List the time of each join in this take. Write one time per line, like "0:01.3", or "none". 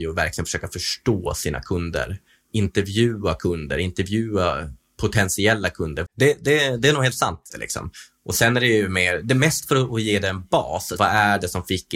0:06.1
0:07.5
0:11.0